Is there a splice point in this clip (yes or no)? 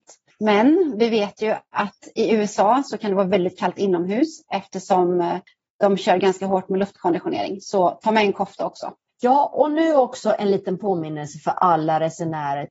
yes